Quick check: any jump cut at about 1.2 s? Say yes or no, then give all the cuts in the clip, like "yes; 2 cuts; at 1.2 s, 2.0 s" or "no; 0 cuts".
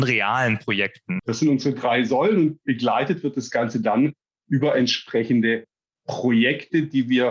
yes; 1 cut; at 1.2 s